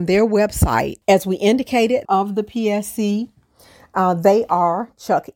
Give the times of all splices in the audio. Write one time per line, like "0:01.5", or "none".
0:01.0
0:02.0